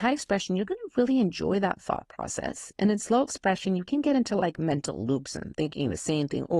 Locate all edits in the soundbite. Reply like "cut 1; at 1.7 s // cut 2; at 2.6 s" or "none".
none